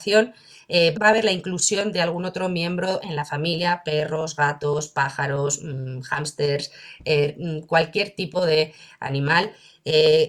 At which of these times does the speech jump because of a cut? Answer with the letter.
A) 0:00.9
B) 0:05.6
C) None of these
A